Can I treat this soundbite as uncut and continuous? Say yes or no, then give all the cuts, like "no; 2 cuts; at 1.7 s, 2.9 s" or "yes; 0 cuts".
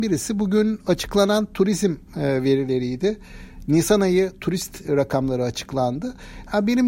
yes; 0 cuts